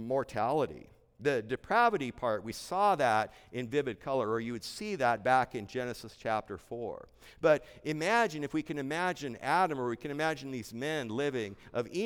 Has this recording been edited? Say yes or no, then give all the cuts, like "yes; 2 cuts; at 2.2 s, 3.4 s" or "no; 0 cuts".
no; 0 cuts